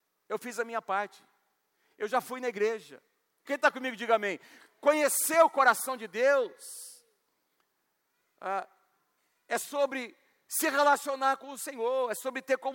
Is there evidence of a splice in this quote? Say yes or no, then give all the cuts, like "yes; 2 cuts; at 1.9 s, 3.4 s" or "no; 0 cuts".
yes; 1 cut; at 3.5 s